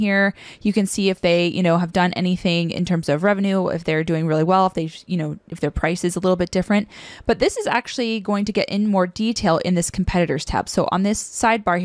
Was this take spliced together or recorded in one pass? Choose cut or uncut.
uncut